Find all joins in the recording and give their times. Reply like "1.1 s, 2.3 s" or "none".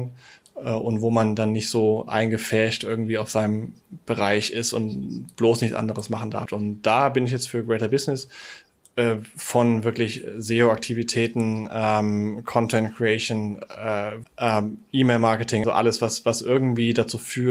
6.5 s, 14.2 s, 15.6 s